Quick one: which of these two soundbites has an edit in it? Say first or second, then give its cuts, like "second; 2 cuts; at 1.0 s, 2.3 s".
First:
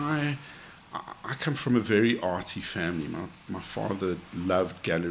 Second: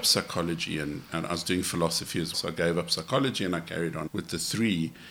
second; 2 cuts; at 2.3 s, 4.1 s